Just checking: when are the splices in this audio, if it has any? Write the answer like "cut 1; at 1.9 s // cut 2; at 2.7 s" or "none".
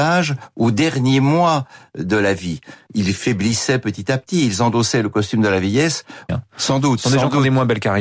cut 1; at 2.9 s // cut 2; at 6.3 s